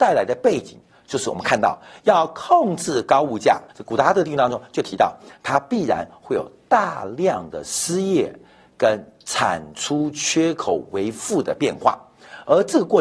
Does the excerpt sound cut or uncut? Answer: cut